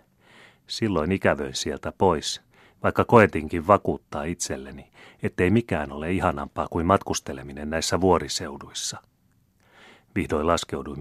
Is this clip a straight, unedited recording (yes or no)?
yes